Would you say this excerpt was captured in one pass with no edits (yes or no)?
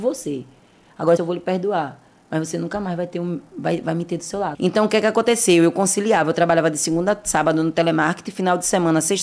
no